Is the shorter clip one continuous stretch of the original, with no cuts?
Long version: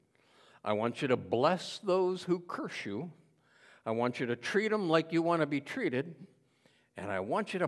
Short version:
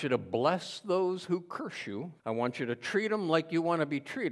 no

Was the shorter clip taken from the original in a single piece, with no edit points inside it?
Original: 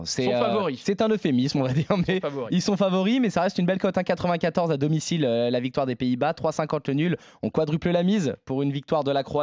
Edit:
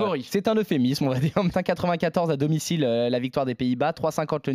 no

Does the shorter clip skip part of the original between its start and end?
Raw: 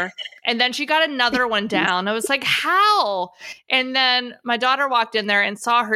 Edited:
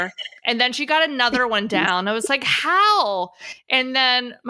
no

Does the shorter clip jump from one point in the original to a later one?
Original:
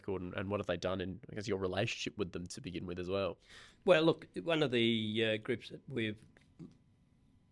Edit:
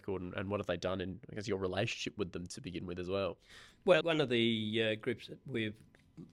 yes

